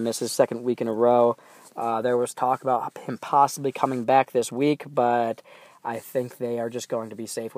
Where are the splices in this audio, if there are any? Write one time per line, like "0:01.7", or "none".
none